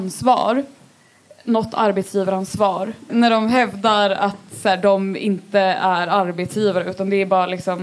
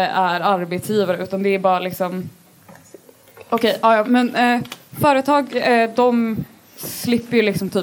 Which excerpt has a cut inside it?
first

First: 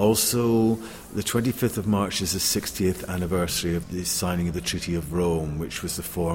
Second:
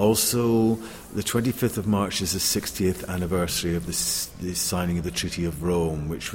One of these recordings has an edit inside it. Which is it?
first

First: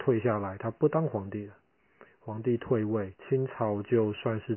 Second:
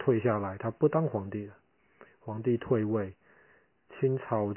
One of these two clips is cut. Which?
first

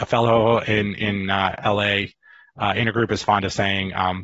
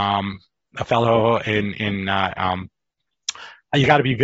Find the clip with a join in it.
second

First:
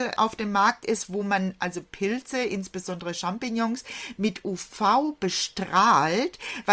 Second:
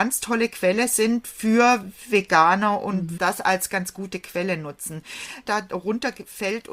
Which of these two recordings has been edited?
second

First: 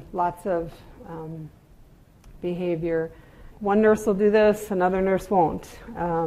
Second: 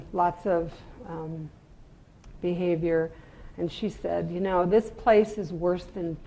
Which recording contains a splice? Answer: first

